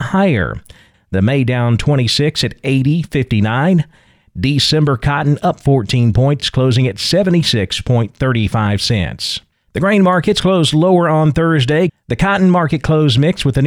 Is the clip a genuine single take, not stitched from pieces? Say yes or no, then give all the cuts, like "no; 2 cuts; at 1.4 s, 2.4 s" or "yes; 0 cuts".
no; 2 cuts; at 0.9 s, 11.9 s